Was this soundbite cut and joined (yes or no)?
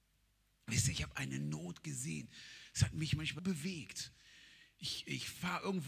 yes